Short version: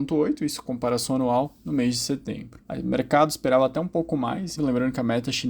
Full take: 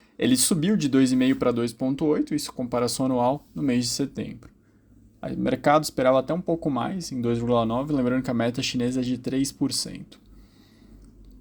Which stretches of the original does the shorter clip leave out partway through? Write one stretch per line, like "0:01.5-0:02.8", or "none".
0:04.5-0:05.2
0:07.1-0:07.9

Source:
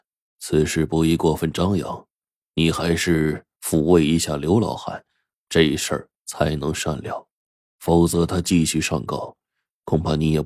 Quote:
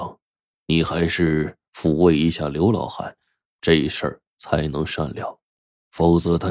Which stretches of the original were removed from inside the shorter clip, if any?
none

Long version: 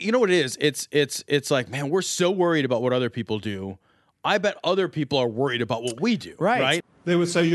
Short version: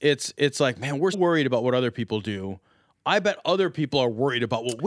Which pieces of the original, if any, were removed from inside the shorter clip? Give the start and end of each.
0:02.0-0:02.3

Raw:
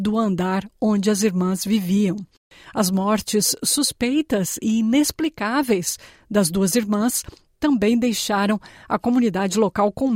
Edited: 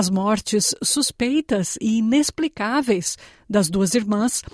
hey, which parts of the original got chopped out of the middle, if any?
none

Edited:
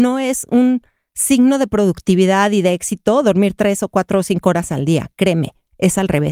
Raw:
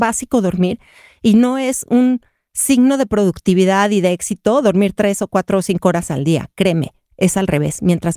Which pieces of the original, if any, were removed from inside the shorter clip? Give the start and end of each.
none

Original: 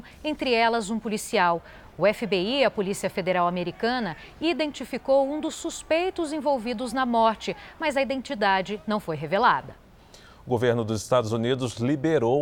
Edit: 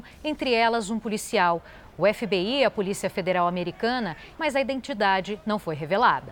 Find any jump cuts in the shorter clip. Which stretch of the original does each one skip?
0:04.3-0:07.7

